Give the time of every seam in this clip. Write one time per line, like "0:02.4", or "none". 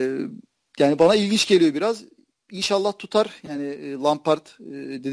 none